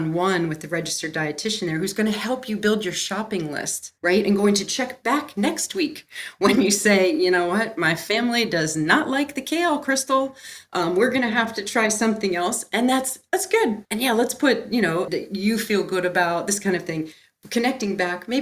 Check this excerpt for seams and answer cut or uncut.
cut